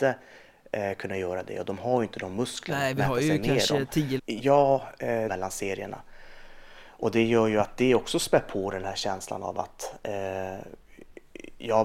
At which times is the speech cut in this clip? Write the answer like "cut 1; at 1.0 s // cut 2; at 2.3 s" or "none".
cut 1; at 4.2 s // cut 2; at 5.3 s